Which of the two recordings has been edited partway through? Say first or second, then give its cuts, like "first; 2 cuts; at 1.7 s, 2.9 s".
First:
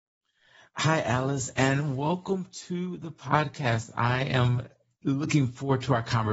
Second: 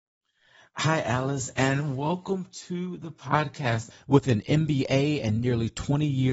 second; 1 cut; at 3.9 s